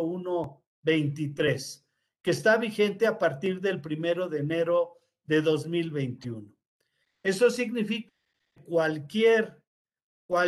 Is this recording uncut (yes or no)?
yes